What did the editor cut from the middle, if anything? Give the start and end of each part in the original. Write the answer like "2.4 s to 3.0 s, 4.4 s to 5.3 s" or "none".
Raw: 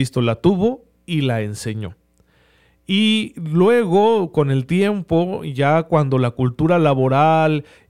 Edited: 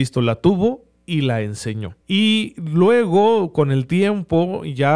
2.0 s to 2.8 s